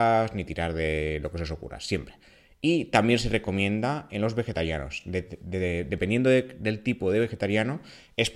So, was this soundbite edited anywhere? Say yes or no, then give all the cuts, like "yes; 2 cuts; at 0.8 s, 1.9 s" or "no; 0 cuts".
no; 0 cuts